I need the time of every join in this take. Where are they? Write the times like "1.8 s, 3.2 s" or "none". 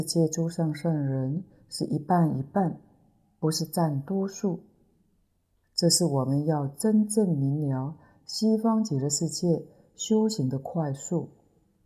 5.6 s